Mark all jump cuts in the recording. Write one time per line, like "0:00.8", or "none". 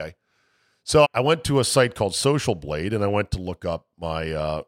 0:01.0